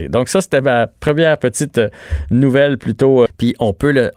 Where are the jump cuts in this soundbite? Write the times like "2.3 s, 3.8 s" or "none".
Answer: 3.3 s